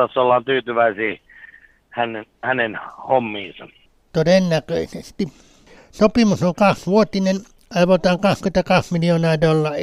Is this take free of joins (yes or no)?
no